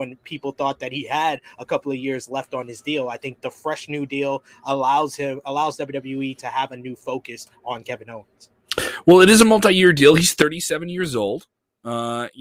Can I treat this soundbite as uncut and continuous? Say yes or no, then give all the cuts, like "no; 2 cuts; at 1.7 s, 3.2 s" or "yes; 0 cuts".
yes; 0 cuts